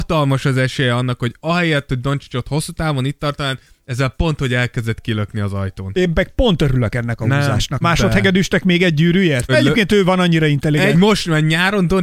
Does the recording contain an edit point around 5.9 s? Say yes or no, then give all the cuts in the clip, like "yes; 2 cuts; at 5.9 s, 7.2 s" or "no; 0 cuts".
no; 3 cuts; at 7.8 s, 9.5 s, 10.9 s